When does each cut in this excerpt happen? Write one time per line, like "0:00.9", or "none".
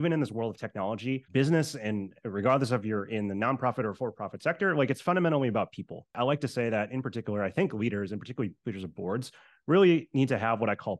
none